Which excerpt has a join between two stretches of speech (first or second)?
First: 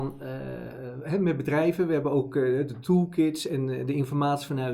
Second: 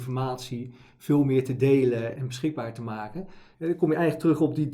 second